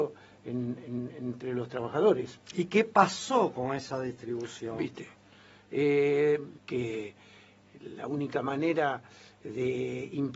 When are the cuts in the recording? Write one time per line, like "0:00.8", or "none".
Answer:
0:06.6